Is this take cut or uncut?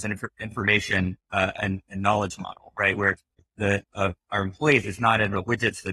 cut